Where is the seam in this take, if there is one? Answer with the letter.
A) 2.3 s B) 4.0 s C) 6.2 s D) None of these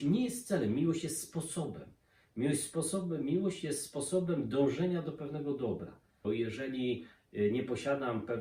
C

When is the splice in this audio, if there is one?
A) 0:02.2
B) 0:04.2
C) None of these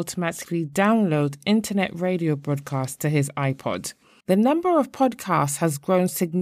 B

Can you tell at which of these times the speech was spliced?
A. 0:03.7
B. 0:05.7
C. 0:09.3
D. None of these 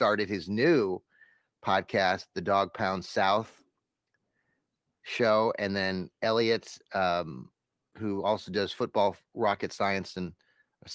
C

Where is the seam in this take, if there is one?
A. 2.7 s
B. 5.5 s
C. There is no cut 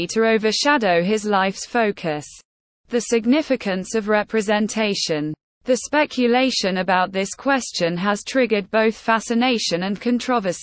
C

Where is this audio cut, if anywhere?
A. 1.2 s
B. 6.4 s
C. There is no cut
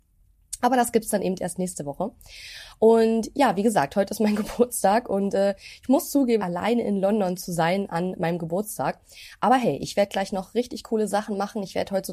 B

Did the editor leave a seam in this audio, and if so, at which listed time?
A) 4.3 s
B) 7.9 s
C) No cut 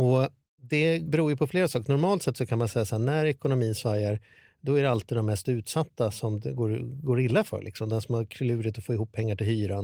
C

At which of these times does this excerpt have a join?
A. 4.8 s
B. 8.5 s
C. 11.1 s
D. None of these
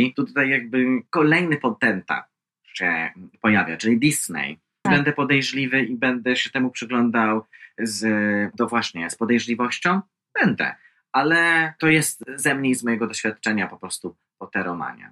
A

